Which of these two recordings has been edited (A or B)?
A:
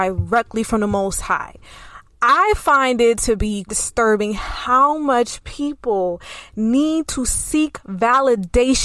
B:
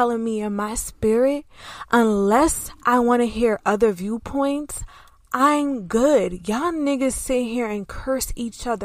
A